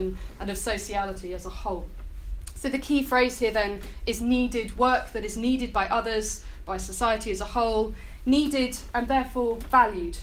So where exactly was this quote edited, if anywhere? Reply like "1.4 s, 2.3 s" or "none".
4.7 s, 6.6 s